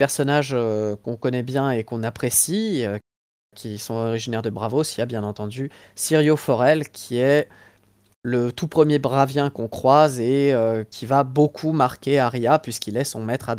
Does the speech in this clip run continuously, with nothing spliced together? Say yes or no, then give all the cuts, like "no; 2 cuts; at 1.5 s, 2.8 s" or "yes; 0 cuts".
yes; 0 cuts